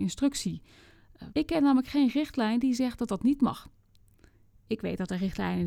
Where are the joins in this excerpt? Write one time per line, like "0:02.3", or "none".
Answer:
0:01.3